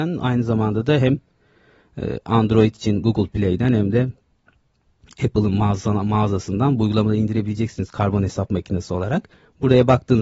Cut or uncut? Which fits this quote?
uncut